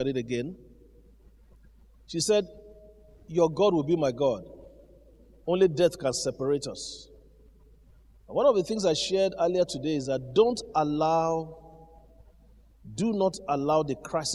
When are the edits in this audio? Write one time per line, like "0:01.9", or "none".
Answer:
0:05.4